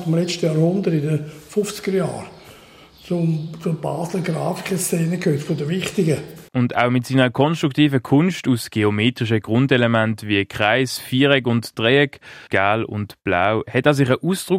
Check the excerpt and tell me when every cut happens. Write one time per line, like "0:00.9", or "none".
0:06.5
0:12.5